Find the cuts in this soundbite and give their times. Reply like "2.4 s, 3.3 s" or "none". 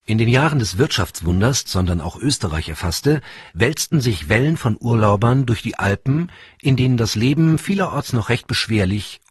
1.7 s